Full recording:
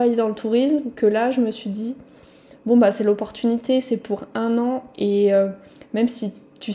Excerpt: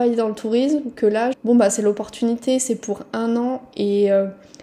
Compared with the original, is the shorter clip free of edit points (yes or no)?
no